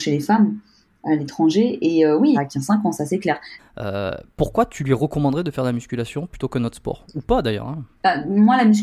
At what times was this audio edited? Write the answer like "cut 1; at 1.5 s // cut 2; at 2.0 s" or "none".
cut 1; at 2.3 s // cut 2; at 3.6 s